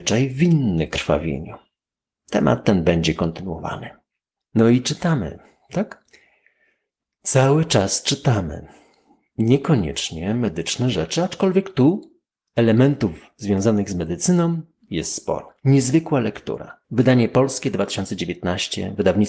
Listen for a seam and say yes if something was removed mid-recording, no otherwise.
yes